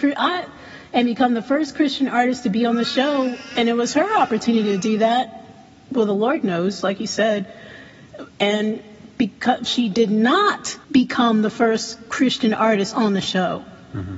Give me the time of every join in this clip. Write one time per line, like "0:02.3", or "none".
0:09.7
0:10.8